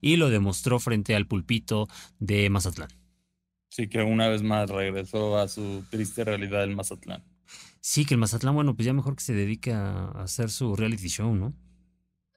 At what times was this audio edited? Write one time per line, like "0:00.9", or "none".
none